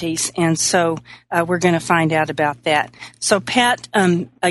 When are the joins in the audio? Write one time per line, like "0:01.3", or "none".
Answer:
none